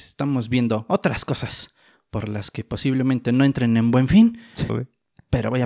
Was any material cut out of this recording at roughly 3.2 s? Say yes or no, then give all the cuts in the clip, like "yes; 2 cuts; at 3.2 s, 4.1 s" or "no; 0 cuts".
no; 1 cut; at 4.7 s